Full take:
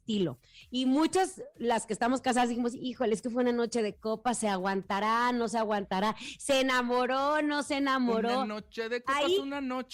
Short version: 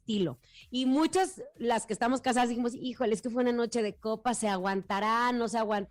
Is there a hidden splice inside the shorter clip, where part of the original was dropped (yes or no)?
no